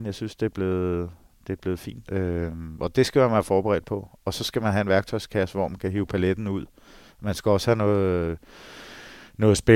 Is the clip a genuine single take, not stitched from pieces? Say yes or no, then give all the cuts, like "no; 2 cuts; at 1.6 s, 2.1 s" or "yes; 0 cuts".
no; 1 cut; at 2.1 s